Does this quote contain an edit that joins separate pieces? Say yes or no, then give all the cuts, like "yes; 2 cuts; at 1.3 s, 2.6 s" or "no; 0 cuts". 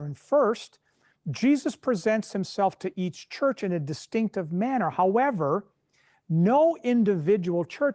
no; 0 cuts